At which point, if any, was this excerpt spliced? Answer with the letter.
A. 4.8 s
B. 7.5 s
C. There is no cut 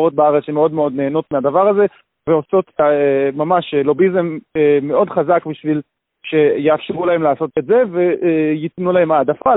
B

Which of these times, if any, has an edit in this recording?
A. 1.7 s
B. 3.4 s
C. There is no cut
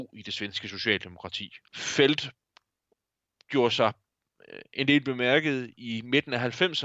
A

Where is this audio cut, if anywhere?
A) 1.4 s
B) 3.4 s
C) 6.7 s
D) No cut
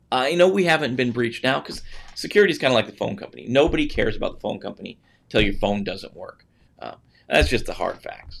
C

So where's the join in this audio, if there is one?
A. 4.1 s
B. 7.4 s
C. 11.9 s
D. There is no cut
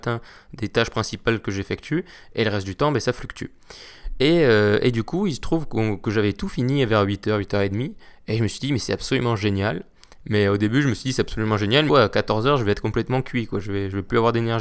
C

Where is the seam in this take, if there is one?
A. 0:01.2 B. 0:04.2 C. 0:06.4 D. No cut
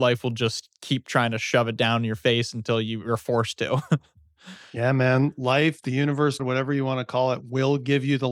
C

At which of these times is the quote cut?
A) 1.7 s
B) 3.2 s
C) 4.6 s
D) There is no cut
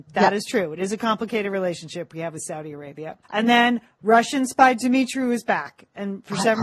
B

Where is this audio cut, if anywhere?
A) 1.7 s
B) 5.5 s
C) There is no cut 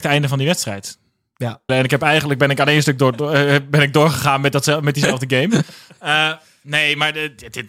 A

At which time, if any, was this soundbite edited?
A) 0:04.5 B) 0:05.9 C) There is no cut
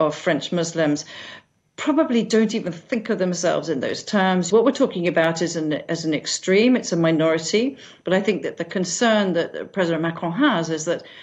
A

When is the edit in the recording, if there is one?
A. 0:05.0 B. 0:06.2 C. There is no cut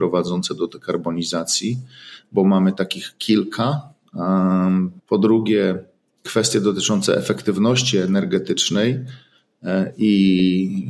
A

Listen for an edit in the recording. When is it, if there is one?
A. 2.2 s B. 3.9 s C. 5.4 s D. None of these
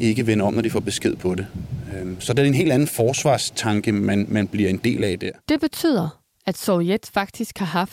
C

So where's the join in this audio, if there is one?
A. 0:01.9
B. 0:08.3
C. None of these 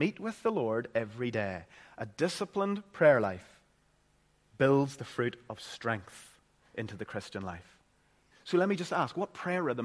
B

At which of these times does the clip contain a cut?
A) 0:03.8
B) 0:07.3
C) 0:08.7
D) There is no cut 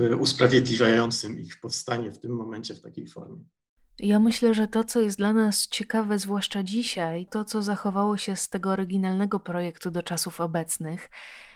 B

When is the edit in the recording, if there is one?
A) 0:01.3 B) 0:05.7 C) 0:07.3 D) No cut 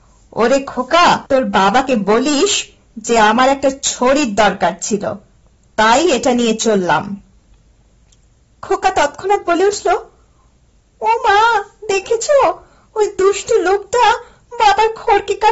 A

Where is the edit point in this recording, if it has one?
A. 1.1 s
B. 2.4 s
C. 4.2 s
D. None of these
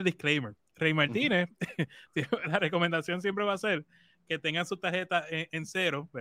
D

